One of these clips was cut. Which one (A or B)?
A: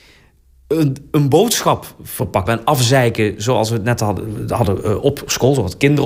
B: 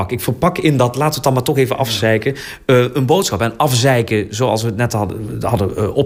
A